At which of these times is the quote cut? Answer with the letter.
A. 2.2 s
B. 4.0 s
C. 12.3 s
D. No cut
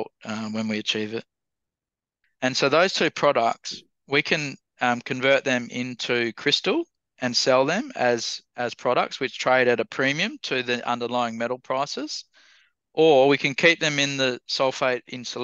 A